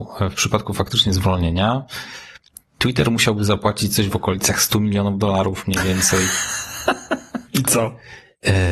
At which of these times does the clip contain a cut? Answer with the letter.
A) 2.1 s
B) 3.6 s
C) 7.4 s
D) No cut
C